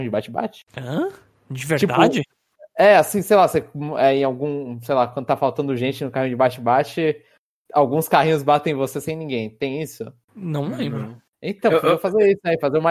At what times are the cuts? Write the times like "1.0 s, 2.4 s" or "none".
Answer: none